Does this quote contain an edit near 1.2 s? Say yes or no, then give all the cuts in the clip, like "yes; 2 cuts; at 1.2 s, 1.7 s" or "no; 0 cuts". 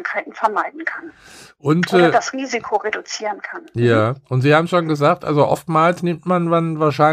no; 0 cuts